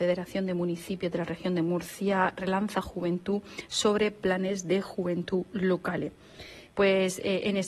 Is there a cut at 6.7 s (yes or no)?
yes